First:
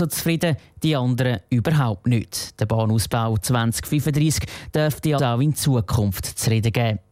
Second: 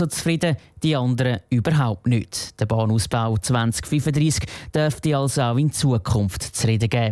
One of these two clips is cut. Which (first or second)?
first